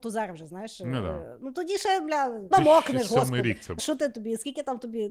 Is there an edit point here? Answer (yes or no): yes